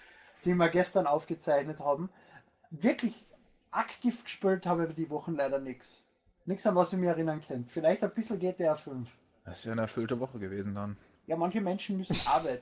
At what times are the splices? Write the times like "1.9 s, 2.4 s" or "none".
none